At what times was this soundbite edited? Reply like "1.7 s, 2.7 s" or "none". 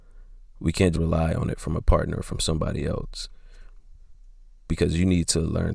0.9 s

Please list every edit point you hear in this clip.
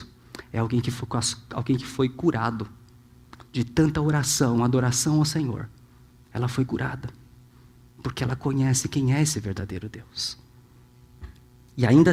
3.4 s

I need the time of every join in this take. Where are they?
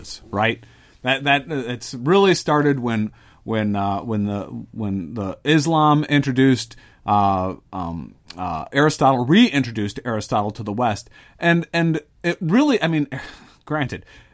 none

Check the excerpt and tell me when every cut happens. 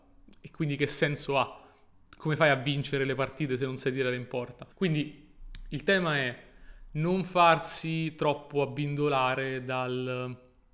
4.7 s

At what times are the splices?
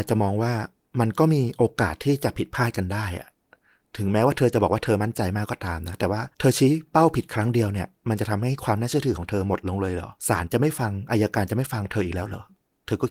6.3 s, 10.2 s

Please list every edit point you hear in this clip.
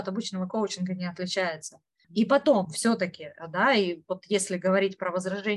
2.0 s

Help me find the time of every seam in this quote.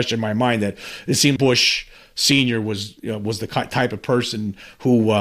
1.4 s

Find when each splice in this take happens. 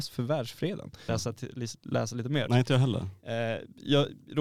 1.1 s, 2.5 s

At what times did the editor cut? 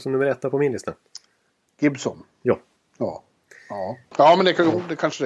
none

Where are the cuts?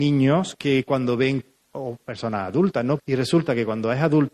3.0 s

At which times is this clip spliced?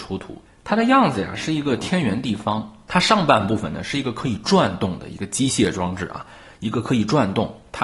none

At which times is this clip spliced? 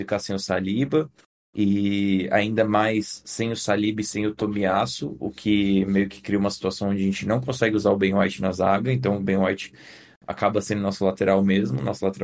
none

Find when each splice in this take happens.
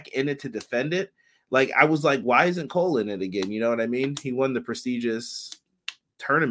none

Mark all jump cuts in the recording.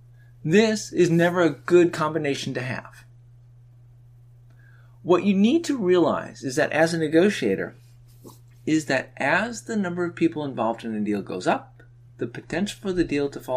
none

